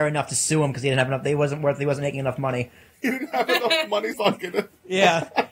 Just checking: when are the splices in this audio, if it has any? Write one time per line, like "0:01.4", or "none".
0:04.1